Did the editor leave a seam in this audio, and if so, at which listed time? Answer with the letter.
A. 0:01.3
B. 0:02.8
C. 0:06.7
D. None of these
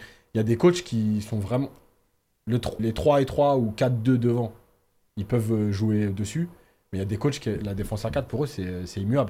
B